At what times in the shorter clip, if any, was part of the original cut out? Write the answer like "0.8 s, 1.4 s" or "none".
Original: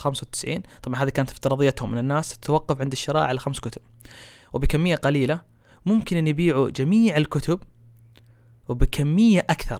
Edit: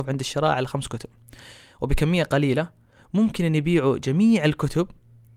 none